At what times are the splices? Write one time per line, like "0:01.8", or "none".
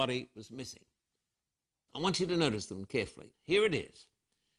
0:01.9
0:03.3

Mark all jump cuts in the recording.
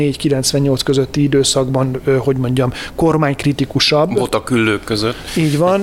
none

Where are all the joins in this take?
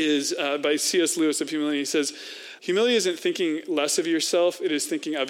0:02.6

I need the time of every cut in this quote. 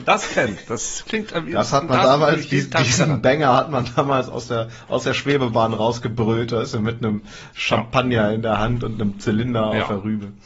none

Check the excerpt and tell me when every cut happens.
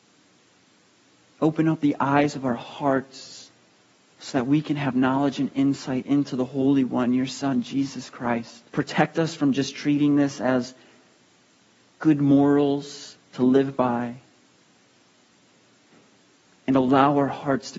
0:08.7

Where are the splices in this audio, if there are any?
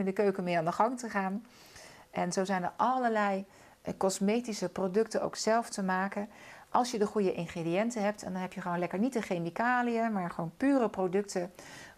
none

